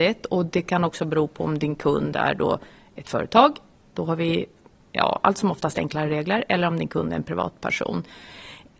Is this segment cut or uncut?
uncut